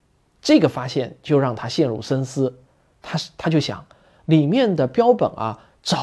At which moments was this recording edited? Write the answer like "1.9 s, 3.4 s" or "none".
4.2 s